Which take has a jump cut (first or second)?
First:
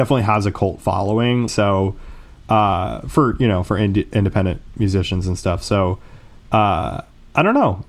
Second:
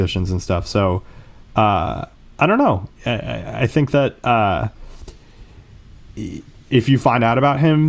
first